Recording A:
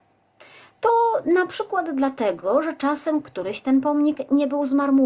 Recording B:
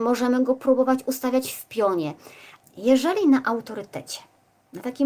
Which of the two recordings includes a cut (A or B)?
B